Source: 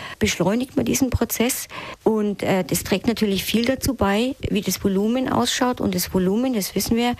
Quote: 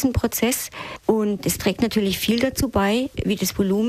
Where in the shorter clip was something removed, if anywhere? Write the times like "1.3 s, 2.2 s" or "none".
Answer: 1.4 s